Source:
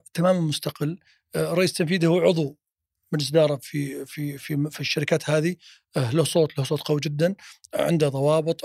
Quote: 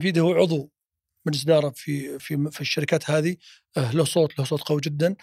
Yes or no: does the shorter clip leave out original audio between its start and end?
yes